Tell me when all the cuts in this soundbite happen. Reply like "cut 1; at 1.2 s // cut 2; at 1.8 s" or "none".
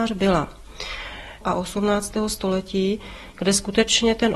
cut 1; at 1.4 s